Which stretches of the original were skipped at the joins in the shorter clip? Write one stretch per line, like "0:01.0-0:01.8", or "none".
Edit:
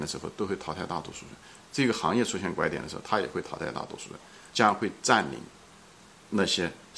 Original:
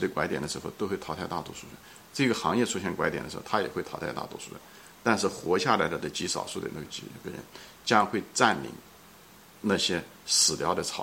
0:04.9-0:07.8